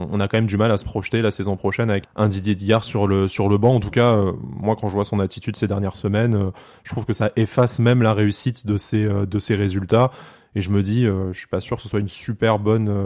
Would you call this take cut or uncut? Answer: cut